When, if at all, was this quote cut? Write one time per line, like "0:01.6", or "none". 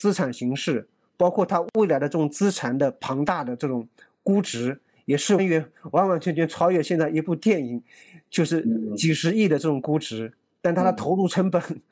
0:05.4